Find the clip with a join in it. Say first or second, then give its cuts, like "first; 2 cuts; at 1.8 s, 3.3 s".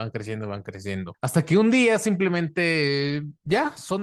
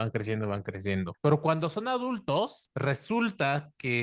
second; 1 cut; at 1.2 s